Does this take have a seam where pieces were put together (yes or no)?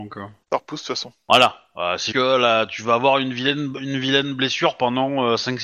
yes